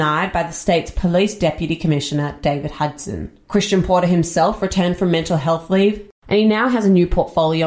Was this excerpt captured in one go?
yes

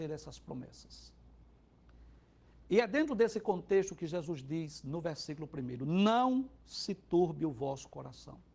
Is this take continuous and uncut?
yes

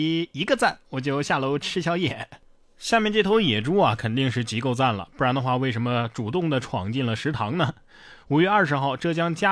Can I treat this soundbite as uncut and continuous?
no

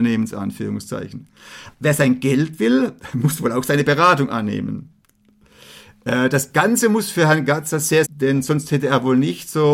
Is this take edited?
yes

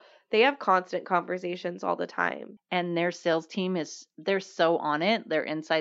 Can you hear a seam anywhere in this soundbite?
yes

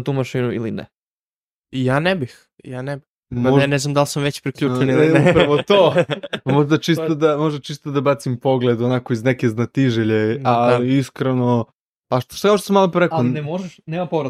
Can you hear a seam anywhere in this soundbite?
no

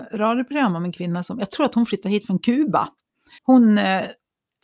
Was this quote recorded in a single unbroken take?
no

